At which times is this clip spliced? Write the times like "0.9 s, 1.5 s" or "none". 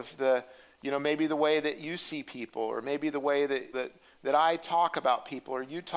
3.7 s